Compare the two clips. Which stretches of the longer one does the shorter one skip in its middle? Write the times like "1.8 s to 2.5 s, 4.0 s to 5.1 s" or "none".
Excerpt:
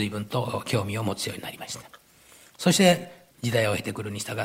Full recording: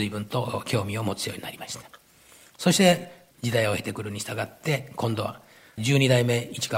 none